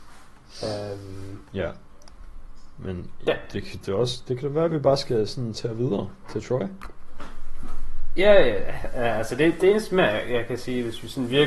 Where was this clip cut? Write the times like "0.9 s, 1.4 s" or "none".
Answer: none